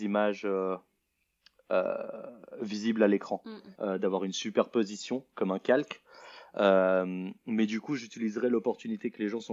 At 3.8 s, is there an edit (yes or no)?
yes